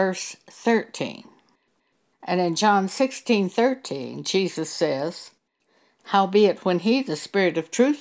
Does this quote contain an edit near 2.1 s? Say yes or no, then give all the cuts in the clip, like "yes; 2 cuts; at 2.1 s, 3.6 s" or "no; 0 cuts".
yes; 1 cut; at 2.1 s